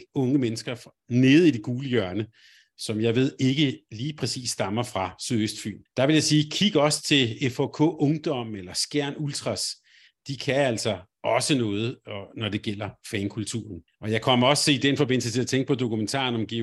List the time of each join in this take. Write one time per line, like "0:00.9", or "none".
none